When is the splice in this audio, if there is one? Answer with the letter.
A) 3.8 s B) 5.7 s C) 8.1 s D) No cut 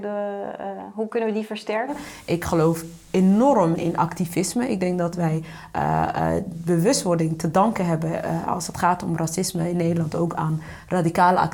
A